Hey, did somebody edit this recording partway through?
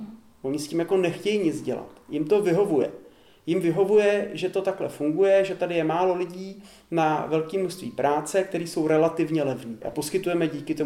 no; 0 cuts

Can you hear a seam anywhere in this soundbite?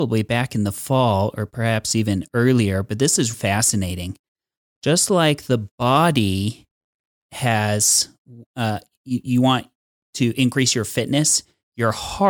yes; 1 cut; at 3.3 s

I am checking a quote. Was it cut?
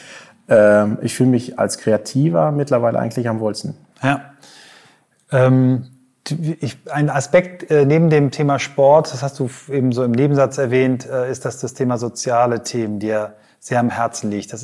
no; 0 cuts

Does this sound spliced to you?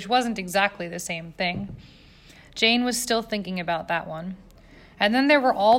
no; 0 cuts

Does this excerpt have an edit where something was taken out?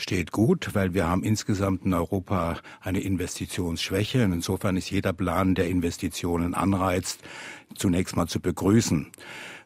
no; 0 cuts

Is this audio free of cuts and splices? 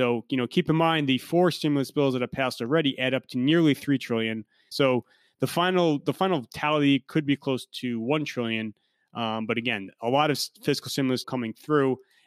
no; 2 cuts; at 4.7 s, 11.2 s

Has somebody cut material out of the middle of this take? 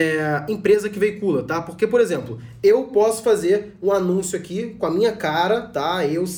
no; 0 cuts

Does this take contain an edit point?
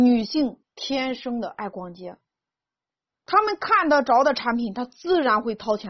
yes; 1 cut; at 3.2 s

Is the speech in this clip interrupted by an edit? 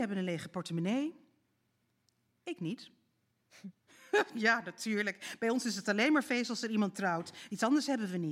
yes; 1 cut; at 3.7 s

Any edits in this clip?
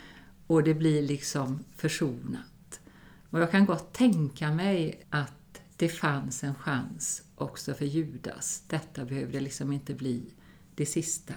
yes; 1 cut; at 5.0 s

